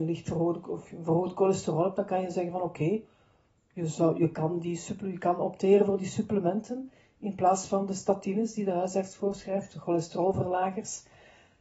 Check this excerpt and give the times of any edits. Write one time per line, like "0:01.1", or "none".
none